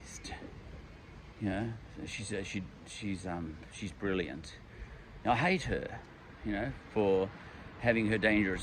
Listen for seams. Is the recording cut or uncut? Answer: uncut